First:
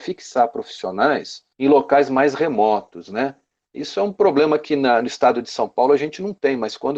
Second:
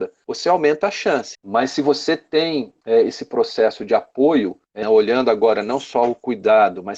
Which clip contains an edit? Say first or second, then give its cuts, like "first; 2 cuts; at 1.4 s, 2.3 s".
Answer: second; 2 cuts; at 1.3 s, 4.8 s